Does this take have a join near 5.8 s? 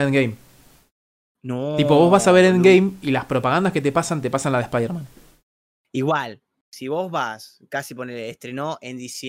no; 0 cuts

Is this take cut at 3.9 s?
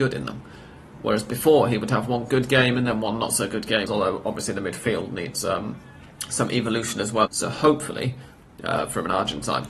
yes; 2 cuts; at 3.9 s, 7.3 s

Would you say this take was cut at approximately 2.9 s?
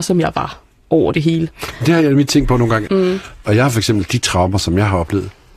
yes; 1 cut; at 2.9 s

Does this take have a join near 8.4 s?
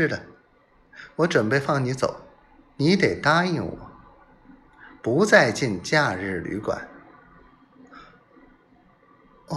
no; 1 cut; at 2.8 s

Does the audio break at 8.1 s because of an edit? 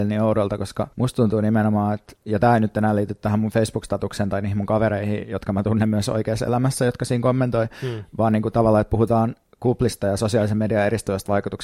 no; 1 cut; at 0.9 s

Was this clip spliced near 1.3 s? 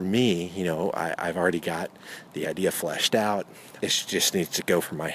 no; 1 cut; at 3.8 s

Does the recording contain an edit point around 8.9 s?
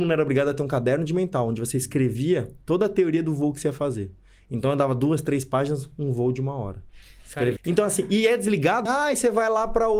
yes; 2 cuts; at 7.6 s, 8.9 s

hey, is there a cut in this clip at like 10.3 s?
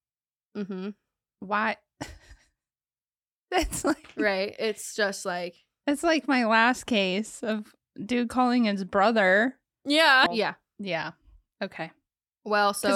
yes; 1 cut; at 10.3 s

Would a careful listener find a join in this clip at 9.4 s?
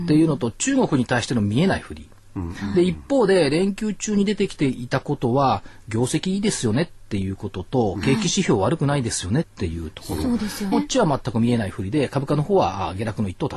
yes; 2 cuts; at 9.4 s, 10.7 s

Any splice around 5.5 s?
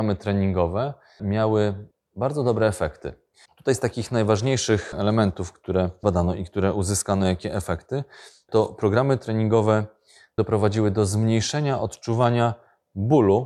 no; 1 cut; at 3.4 s

